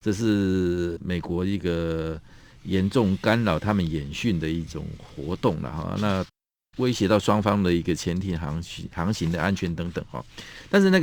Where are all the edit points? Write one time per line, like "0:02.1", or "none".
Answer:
none